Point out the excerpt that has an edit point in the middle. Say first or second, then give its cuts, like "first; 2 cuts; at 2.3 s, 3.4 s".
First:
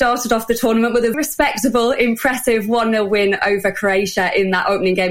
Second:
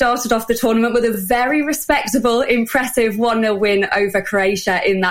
first; 1 cut; at 1.1 s